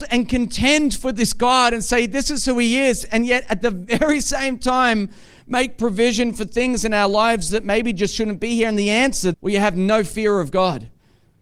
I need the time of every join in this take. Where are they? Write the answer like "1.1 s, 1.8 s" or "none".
9.3 s